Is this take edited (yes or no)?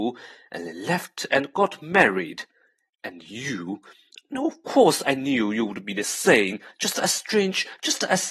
no